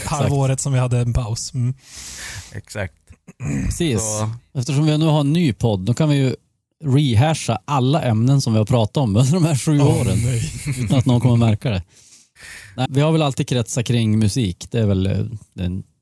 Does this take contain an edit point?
yes; 1 cut; at 12.9 s

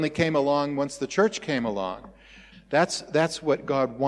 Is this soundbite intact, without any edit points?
no; 1 cut; at 2.5 s

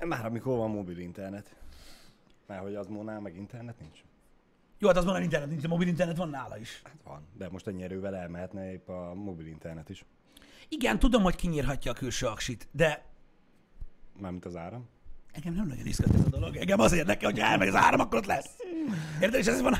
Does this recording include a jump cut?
no; 0 cuts

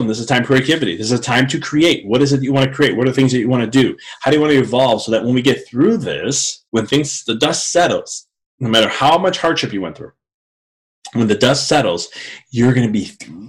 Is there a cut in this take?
yes; 1 cut; at 6.7 s

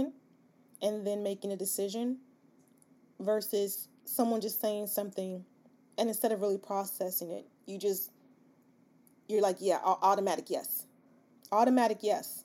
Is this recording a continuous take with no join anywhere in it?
yes; 0 cuts

